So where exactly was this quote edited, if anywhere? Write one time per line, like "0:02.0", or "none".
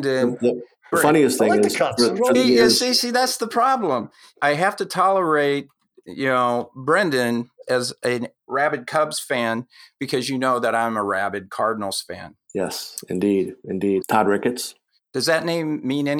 0:02.3
0:14.0